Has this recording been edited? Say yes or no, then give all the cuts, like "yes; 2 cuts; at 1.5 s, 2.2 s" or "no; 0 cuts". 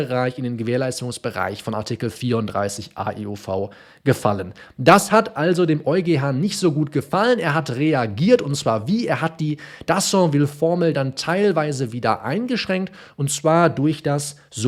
no; 0 cuts